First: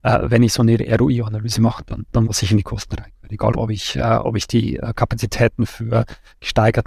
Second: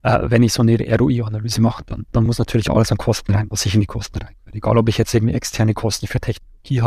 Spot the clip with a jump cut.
first; 2 cuts; at 2.3 s, 3.5 s

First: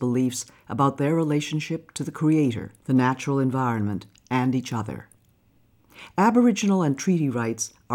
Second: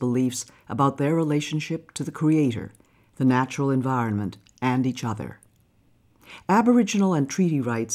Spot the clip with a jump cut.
first; 1 cut; at 2.8 s

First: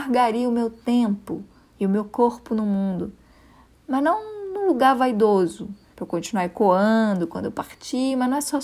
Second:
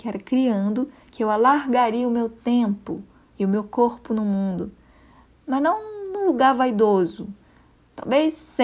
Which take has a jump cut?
first; 1 cut; at 5.9 s

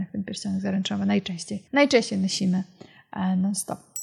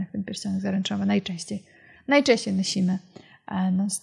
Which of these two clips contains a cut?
first; 1 cut; at 1.7 s

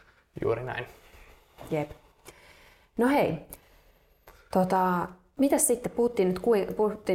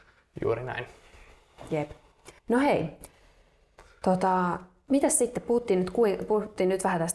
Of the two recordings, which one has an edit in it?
second; 1 cut; at 2.4 s

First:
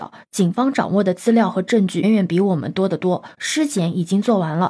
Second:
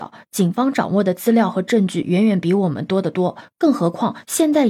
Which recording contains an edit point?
first; 2 cuts; at 2.0 s, 3.3 s

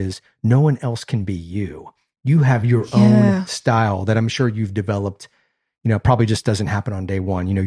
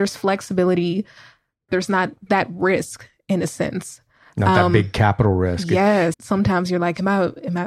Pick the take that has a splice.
second; 2 cuts; at 1.7 s, 6.1 s

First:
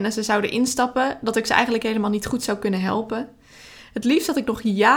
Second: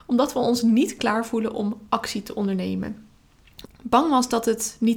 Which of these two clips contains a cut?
second; 1 cut; at 3.7 s

